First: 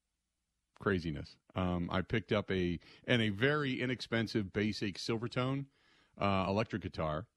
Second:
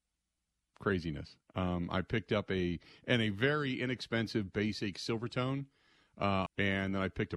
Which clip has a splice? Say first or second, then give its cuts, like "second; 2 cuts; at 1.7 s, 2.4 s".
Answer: second; 1 cut; at 6.5 s